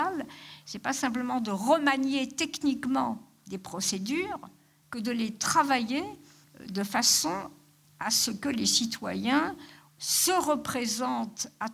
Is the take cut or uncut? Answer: cut